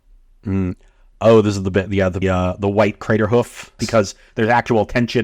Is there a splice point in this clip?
yes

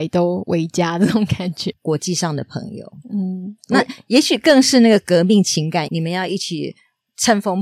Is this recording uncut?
no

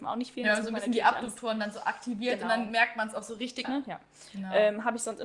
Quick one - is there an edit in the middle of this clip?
yes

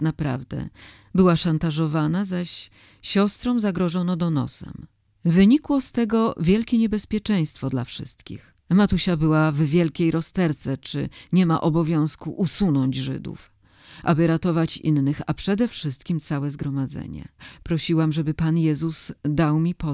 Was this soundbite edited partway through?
yes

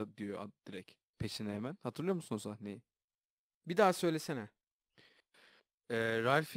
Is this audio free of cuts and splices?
no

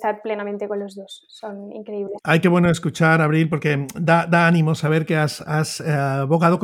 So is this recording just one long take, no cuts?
yes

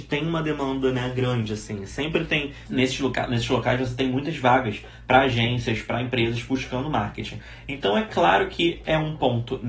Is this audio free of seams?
no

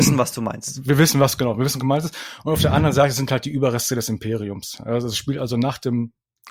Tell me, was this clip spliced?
no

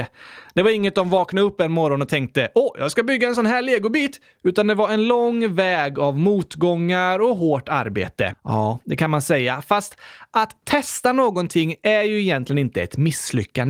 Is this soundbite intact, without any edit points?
no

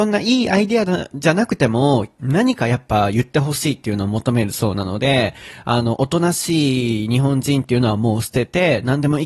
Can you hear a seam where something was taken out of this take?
yes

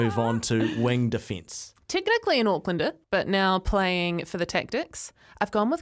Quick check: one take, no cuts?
no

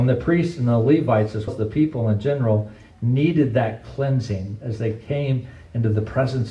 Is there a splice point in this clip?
yes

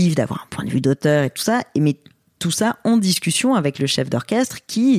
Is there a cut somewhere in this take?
no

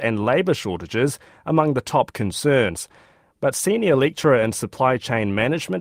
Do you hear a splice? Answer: no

